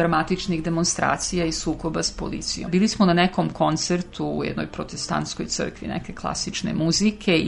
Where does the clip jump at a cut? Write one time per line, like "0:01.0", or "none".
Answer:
0:02.7